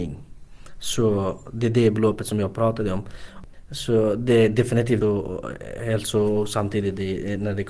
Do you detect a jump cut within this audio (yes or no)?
yes